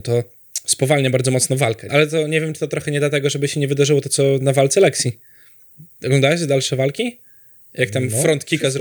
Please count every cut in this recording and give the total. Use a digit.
1